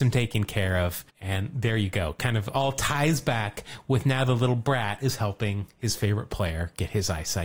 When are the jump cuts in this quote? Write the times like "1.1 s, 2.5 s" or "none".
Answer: 1.1 s